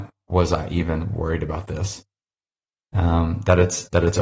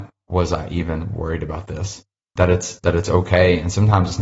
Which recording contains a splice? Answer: second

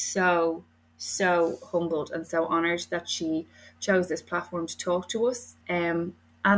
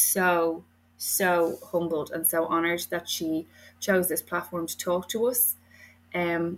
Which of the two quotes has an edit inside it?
first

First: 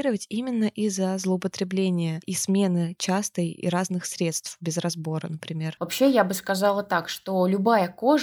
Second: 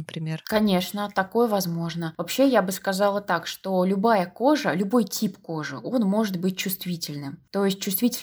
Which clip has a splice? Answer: first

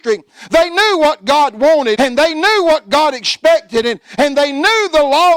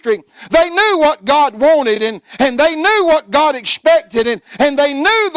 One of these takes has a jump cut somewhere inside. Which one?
first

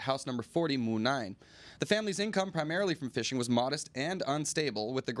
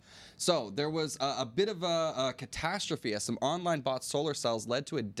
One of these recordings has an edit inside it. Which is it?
first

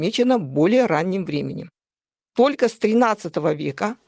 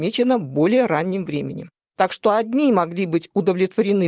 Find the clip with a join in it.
second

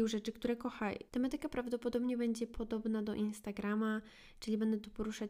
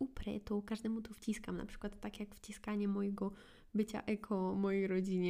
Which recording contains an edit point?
first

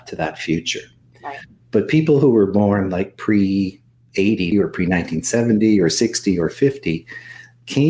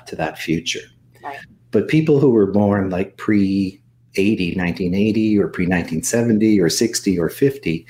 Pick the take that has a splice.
first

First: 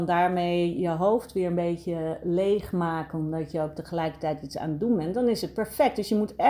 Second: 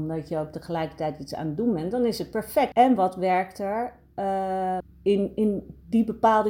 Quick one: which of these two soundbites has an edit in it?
second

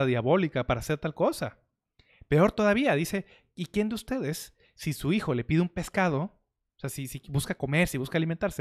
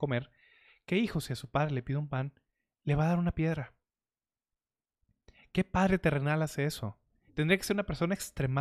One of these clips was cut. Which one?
second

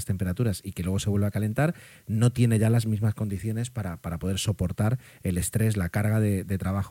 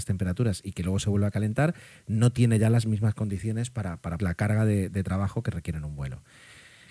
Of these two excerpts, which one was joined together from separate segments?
second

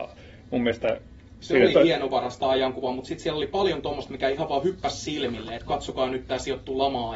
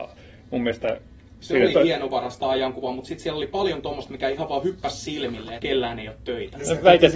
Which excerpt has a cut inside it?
second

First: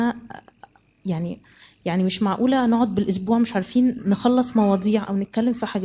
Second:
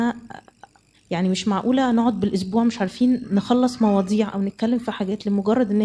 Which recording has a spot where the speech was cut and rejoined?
second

